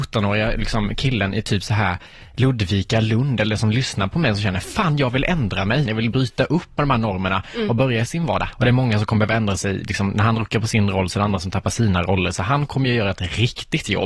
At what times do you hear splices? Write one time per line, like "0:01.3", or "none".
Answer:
0:05.9
0:08.5